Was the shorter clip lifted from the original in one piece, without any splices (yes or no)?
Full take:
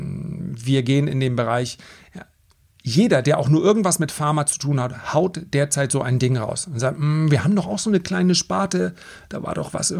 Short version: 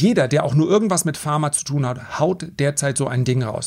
yes